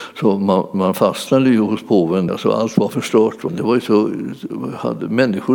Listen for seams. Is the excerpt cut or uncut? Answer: cut